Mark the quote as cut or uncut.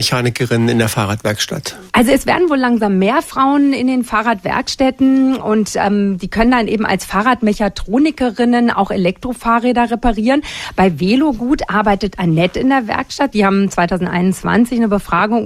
cut